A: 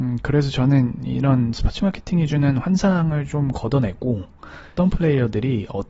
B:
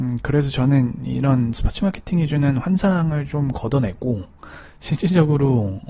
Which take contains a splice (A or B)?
A